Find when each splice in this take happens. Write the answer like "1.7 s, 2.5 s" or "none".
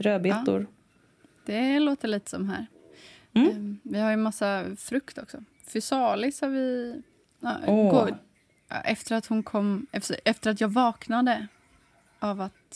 8.1 s